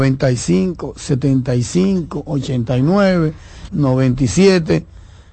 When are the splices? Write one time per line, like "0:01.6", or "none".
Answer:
0:02.3
0:03.7